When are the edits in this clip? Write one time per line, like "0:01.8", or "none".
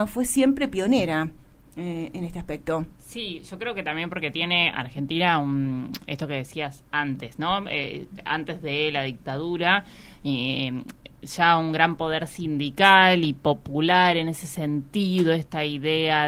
none

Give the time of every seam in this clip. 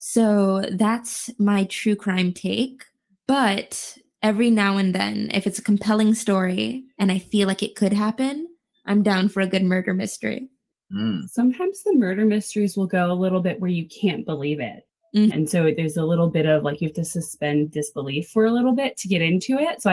0:15.3

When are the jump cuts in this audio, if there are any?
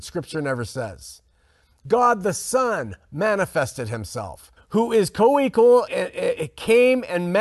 0:04.6
0:05.9

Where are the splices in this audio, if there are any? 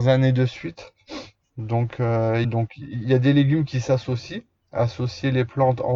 0:02.4

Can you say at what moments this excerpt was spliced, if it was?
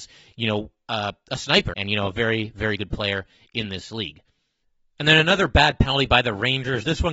0:01.7

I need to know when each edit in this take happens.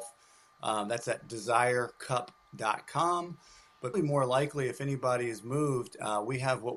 0:03.9

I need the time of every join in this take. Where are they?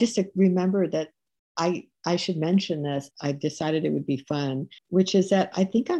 0:03.1
0:04.8

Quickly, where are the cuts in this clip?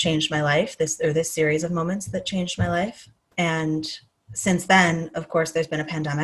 none

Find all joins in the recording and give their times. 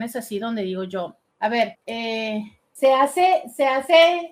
none

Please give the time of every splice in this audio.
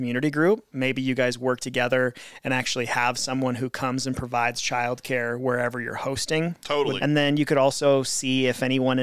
0:07.0

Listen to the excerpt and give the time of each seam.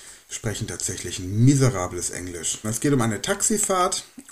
0:02.6

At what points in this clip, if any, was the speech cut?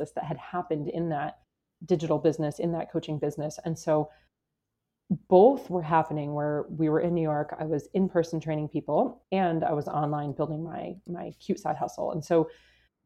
none

